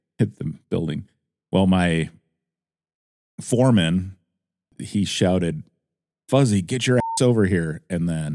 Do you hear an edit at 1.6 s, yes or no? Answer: no